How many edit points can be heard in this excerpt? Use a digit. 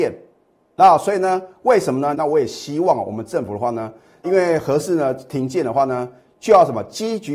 2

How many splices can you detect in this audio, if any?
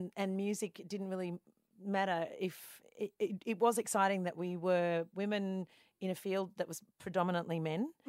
0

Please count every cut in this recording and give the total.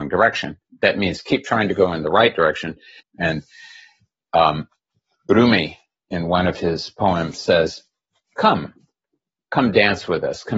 1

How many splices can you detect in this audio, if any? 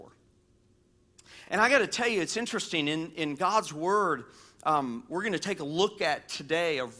0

